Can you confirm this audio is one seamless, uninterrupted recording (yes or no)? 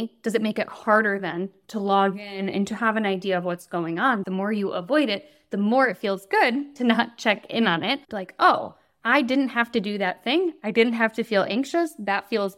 no